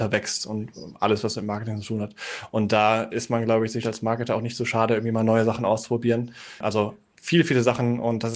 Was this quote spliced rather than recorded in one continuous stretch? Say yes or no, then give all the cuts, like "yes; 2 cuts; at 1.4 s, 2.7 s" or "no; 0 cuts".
yes; 1 cut; at 6.6 s